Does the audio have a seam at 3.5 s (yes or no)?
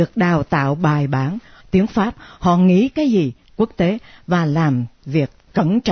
yes